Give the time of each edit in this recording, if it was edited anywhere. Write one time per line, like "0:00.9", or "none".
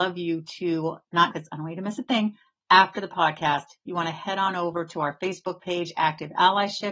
0:01.3